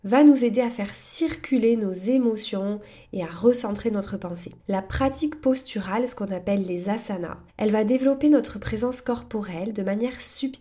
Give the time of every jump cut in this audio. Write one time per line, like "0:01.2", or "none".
0:04.6
0:07.5